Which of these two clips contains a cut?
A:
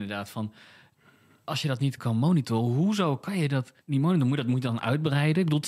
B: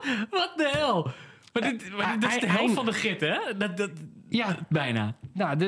A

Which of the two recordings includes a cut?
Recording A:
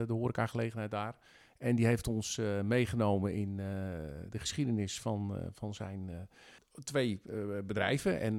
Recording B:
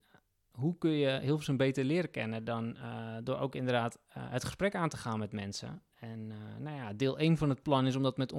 A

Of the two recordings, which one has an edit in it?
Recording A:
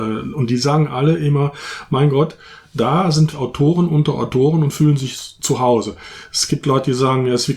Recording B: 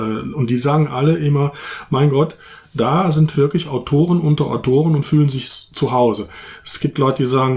A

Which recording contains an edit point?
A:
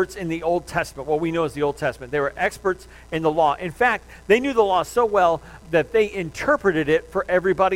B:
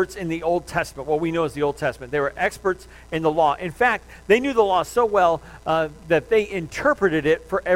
A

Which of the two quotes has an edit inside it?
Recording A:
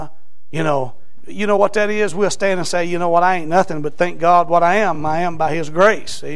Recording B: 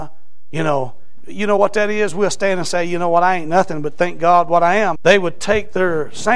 B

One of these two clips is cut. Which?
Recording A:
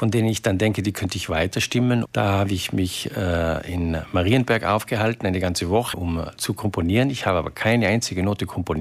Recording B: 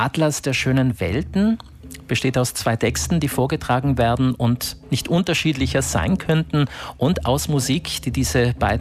A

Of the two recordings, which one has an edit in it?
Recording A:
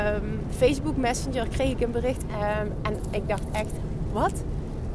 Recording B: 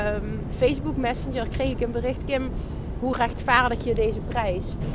A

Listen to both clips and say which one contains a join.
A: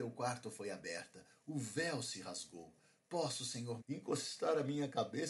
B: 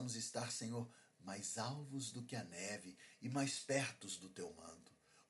A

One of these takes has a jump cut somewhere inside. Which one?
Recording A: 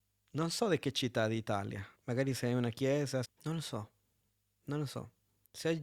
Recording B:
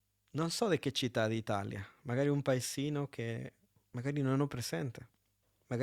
A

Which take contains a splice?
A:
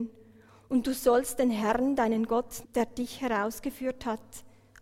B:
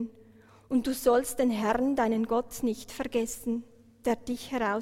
A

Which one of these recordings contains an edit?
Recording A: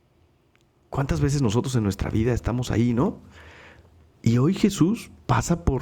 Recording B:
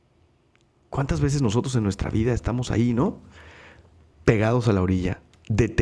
A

